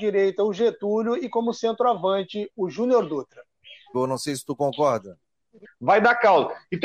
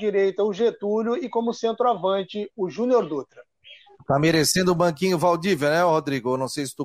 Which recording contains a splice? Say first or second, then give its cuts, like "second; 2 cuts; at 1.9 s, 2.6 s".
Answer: first; 2 cuts; at 3.9 s, 5.6 s